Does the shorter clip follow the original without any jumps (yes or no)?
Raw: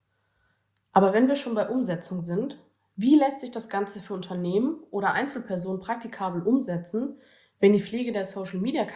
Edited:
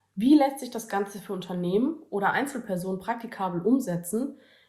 yes